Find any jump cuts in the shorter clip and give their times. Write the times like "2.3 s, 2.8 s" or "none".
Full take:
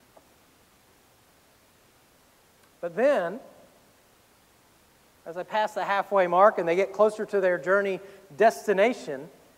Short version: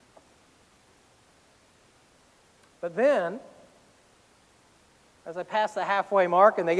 none